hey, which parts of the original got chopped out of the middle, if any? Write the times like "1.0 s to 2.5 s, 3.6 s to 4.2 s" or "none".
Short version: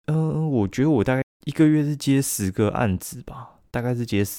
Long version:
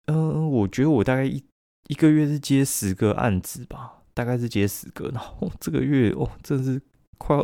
1.2 s to 1.6 s